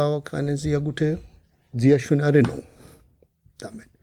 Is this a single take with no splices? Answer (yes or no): yes